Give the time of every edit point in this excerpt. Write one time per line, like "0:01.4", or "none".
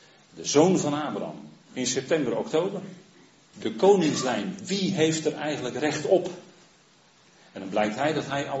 0:01.7
0:03.5